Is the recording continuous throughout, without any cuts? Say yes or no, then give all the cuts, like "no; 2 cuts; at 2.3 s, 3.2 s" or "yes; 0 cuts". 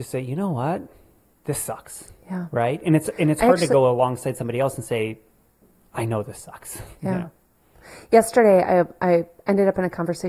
yes; 0 cuts